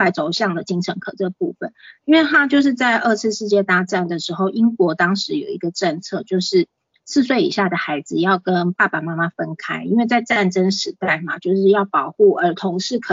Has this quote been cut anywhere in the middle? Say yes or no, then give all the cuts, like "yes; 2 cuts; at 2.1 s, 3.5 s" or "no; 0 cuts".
no; 0 cuts